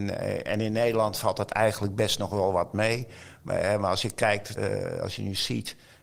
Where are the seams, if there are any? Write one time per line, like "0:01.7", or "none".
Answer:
0:04.6

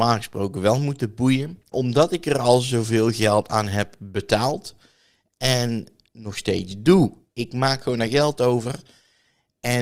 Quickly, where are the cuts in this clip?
0:01.7
0:07.3

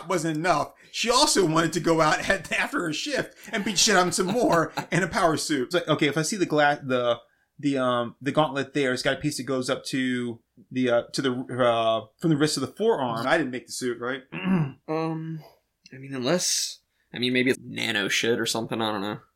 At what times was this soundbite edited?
0:05.7
0:13.2
0:17.5

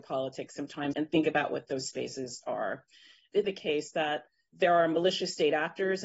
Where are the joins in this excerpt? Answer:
0:00.9
0:03.4

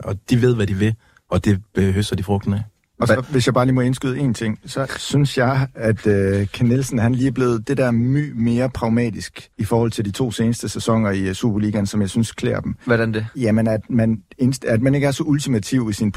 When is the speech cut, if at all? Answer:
0:09.5

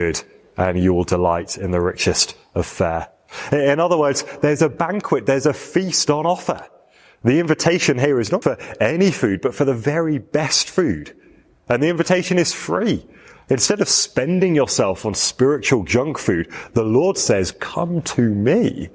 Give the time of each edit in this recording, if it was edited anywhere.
0:08.4

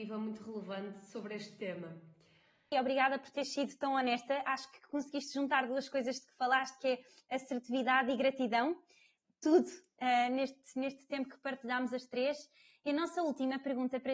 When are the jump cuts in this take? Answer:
0:02.7

